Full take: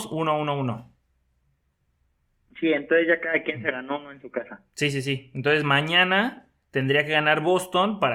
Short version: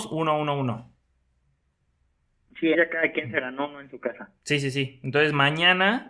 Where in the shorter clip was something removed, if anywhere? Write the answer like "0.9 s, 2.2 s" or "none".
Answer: 2.7 s